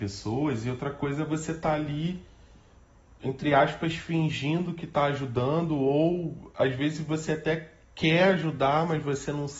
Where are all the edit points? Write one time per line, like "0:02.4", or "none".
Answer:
none